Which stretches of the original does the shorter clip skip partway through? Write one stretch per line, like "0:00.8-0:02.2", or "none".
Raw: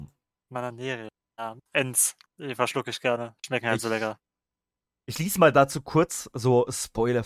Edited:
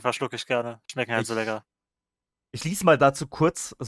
none